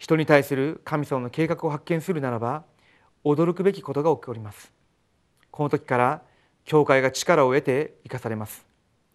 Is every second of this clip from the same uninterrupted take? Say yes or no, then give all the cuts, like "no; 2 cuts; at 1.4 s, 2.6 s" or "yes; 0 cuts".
yes; 0 cuts